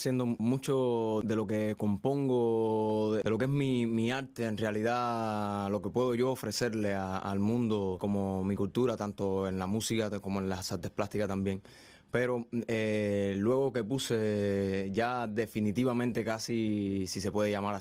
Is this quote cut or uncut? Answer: uncut